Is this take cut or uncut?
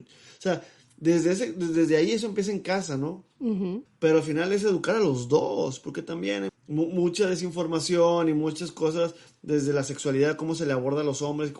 cut